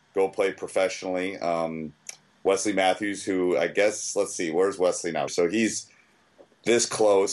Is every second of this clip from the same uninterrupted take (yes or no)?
no